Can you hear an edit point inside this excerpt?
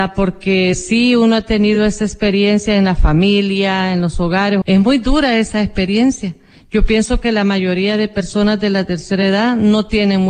yes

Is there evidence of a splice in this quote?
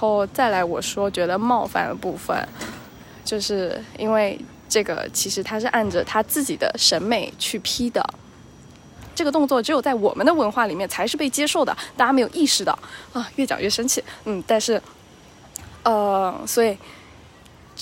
yes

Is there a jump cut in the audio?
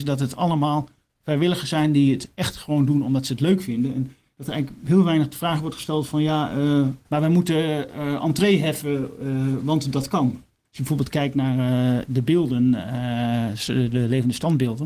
yes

